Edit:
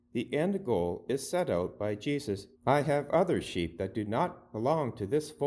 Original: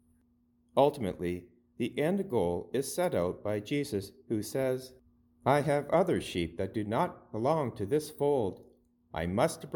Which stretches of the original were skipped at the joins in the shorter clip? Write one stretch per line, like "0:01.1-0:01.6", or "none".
0:04.2-0:05.3

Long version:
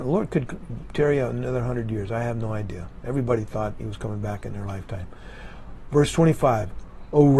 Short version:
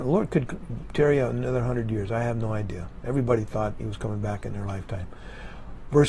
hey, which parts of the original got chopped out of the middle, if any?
none

